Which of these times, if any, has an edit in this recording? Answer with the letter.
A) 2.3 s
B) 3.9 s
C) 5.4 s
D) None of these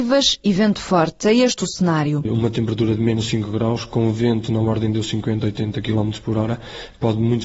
A